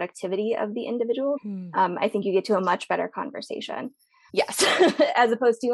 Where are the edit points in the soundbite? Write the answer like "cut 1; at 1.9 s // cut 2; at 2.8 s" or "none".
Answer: cut 1; at 1.4 s // cut 2; at 4.3 s